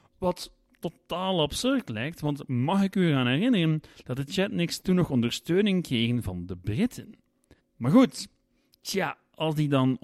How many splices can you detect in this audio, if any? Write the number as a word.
one